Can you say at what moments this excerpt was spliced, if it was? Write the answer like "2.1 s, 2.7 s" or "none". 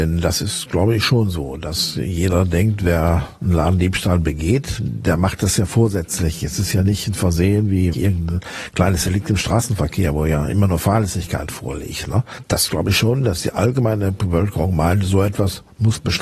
7.9 s